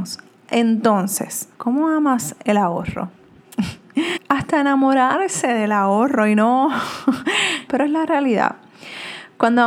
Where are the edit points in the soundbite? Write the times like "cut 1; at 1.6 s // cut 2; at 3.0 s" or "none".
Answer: cut 1; at 1.5 s // cut 2; at 4.2 s // cut 3; at 7.7 s